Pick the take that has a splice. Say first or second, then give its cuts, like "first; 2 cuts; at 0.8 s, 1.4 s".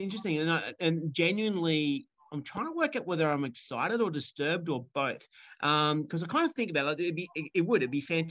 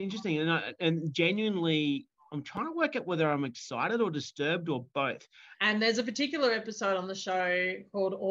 second; 1 cut; at 5.5 s